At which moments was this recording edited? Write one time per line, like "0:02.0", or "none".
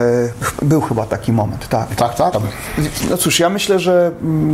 0:02.3